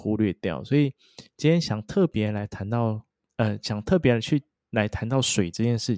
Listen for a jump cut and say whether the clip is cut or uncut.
uncut